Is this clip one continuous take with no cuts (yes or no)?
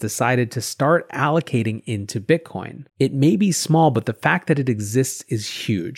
no